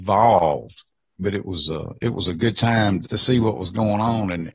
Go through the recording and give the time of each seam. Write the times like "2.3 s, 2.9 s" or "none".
1.2 s, 3.0 s